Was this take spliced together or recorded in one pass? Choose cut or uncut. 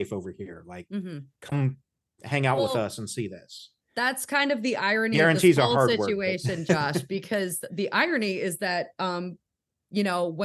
uncut